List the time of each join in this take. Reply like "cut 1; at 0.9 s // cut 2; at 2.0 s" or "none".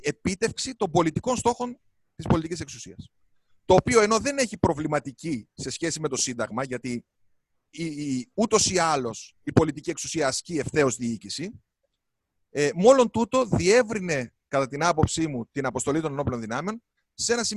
cut 1; at 7.7 s

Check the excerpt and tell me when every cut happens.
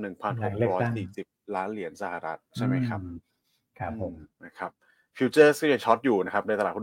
cut 1; at 2.5 s // cut 2; at 4.3 s

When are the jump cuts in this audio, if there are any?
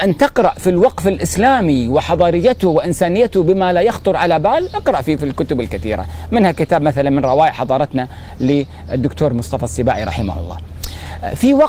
cut 1; at 5.2 s

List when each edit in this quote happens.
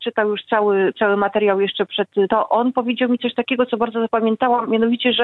cut 1; at 2.3 s

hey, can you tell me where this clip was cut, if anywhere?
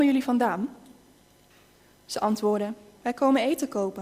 cut 1; at 3.0 s

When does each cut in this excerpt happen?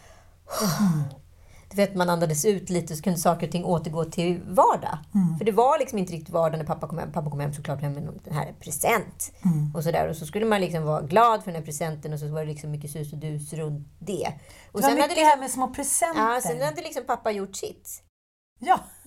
none

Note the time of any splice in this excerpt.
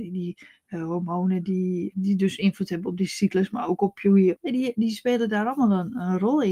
cut 1; at 1.9 s // cut 2; at 4.3 s

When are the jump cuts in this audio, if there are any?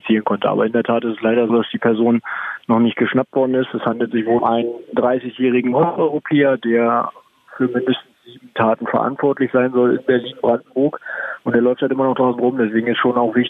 cut 1; at 1.5 s // cut 2; at 4.4 s

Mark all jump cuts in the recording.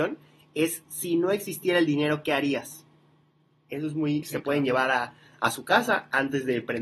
cut 1; at 4.2 s

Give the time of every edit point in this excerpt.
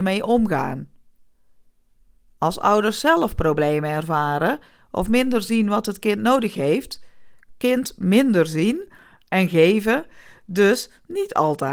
cut 1; at 7.5 s

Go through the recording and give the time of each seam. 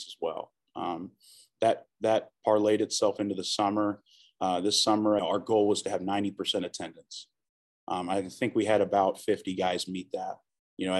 cut 1; at 5.2 s

